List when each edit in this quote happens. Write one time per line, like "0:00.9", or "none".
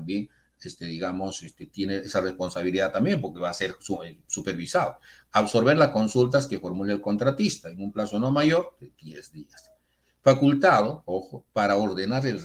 none